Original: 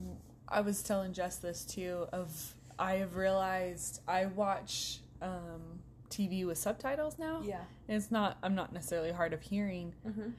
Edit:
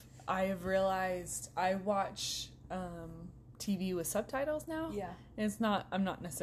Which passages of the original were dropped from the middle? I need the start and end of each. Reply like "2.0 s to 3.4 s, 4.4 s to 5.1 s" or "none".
none